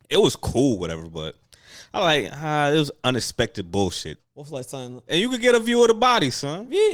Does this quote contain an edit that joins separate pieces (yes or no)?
yes